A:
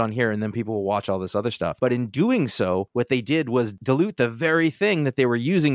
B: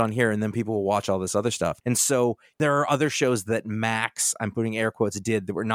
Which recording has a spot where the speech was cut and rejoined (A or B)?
B